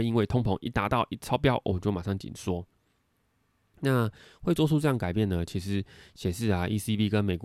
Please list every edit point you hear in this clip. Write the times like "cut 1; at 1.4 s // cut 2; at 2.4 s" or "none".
none